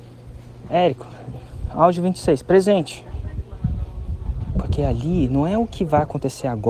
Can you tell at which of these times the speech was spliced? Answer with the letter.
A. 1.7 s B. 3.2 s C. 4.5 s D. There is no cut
D